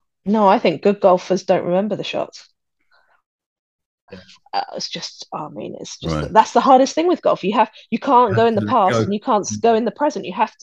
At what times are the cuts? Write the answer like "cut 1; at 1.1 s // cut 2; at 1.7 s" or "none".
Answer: cut 1; at 4.1 s